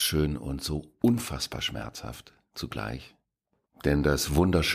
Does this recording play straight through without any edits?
no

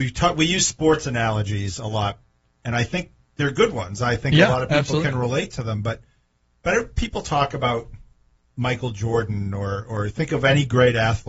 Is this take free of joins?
yes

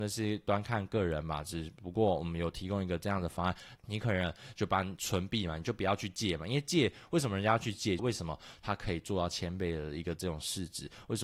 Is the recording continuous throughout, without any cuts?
no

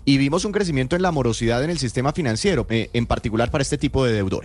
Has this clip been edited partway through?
yes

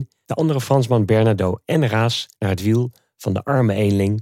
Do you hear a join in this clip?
yes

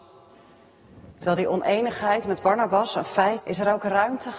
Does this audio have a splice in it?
yes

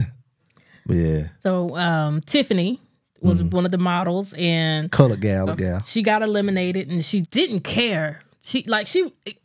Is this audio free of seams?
no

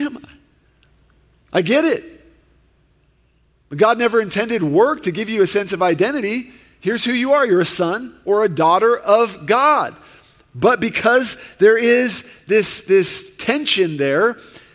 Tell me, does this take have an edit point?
no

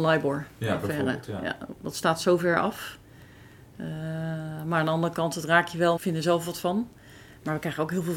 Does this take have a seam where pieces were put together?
yes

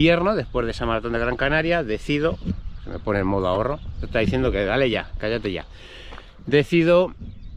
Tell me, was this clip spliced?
no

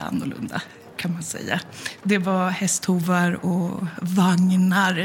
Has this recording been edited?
yes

